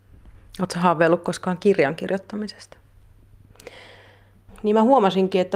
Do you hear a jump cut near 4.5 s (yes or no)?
yes